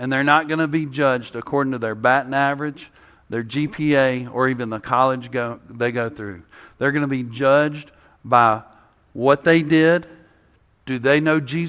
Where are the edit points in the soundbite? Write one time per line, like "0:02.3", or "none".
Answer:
none